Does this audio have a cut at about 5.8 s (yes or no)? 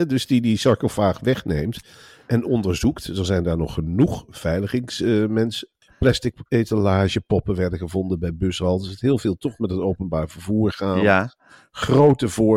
yes